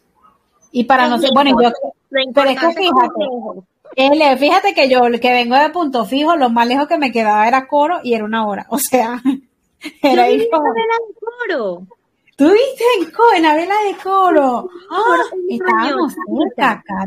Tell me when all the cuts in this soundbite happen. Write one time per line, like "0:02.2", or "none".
none